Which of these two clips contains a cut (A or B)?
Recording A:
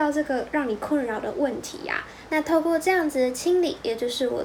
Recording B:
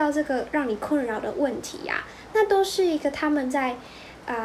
A